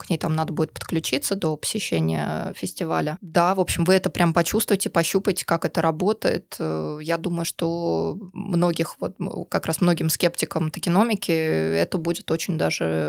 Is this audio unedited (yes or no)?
yes